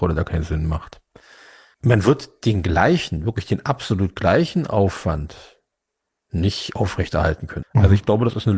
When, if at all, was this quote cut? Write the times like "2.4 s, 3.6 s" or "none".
7.6 s

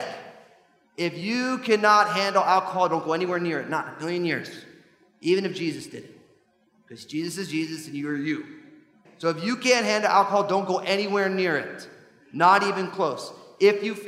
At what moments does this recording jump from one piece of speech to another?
9.0 s

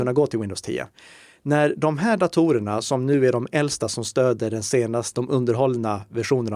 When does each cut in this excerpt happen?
5.1 s

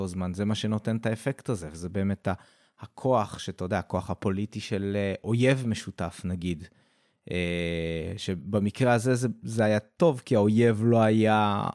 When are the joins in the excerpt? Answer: none

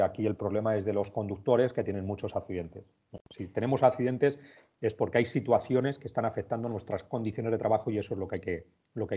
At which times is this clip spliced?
none

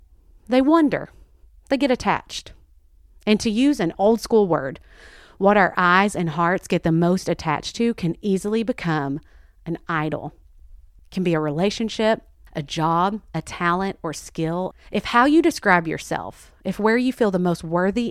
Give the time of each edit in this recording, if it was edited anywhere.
11.0 s, 12.5 s, 14.7 s

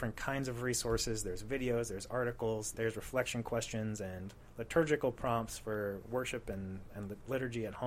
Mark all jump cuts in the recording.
2.7 s

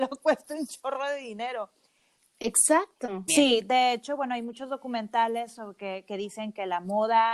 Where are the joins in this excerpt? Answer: 3.3 s

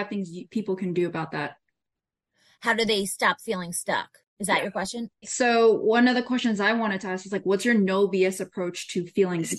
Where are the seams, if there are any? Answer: 5.2 s

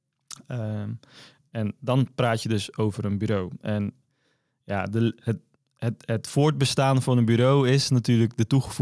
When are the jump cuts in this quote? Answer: none

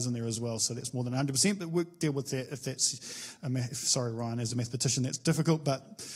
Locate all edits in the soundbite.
none

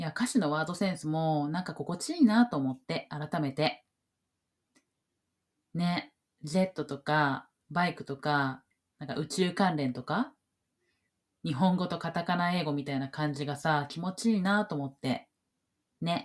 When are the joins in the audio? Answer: none

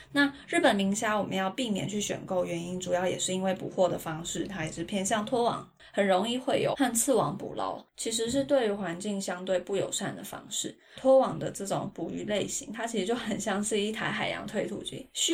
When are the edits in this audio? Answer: 6.7 s, 11.0 s

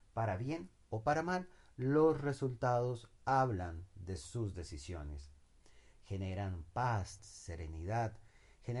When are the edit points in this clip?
5.9 s, 7.2 s

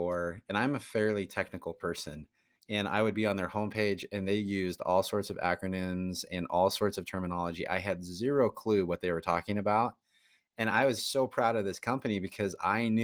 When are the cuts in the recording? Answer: 2.6 s, 11.0 s

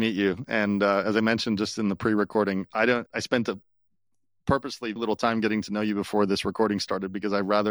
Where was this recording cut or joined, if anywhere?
3.1 s, 5.0 s

